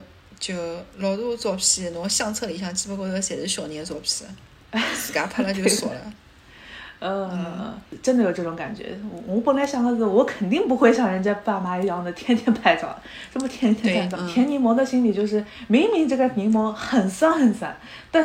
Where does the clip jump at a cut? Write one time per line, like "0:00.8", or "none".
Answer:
0:14.1